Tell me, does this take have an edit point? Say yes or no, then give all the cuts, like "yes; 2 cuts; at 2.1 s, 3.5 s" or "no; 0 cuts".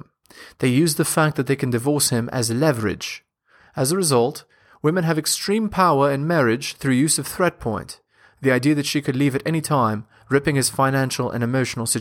no; 0 cuts